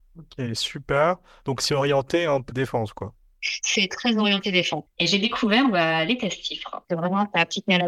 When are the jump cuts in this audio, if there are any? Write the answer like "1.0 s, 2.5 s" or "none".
2.5 s, 4.9 s, 6.8 s